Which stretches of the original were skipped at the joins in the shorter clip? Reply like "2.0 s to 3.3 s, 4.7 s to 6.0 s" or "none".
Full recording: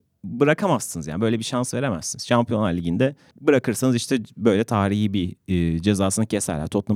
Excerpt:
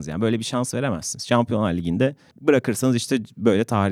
none